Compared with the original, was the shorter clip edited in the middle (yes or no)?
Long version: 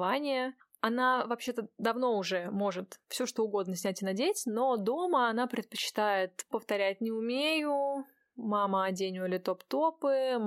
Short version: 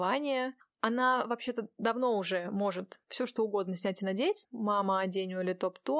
yes